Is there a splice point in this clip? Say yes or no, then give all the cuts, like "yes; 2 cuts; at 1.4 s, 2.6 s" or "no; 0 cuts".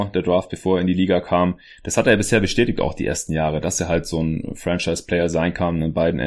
no; 0 cuts